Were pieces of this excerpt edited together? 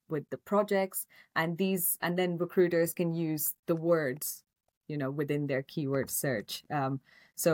no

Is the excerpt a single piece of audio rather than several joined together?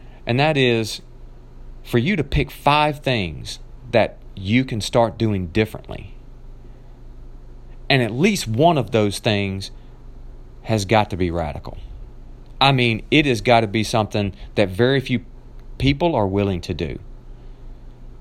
yes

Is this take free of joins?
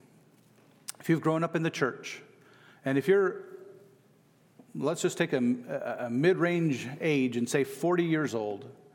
yes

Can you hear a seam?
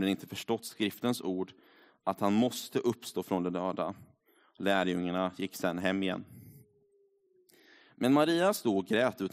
no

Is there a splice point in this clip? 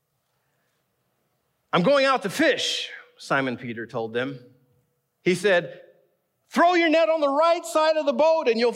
yes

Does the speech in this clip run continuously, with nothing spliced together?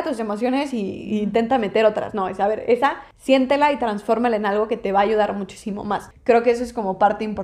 yes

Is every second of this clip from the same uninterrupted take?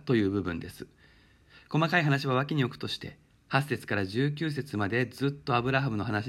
yes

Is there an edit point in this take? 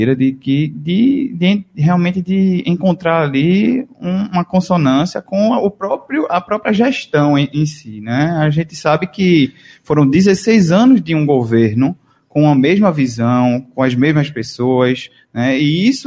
no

